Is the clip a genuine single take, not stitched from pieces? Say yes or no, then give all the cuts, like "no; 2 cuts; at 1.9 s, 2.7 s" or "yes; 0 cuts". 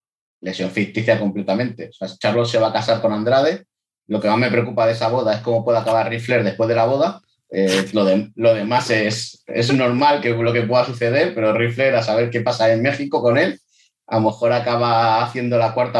yes; 0 cuts